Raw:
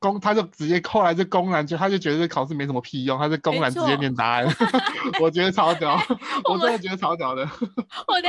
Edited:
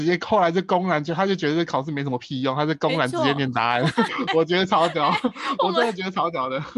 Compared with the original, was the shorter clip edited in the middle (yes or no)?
yes